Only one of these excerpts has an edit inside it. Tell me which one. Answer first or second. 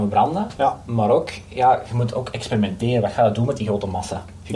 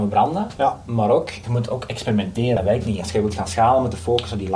second